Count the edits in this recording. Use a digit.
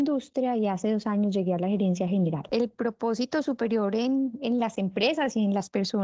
1